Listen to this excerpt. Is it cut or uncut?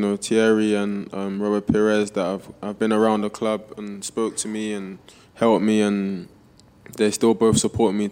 uncut